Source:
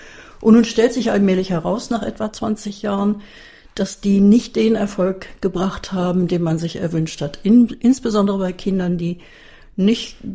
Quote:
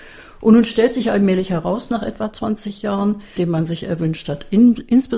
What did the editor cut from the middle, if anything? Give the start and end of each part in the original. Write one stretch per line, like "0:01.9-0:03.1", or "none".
0:03.4-0:06.3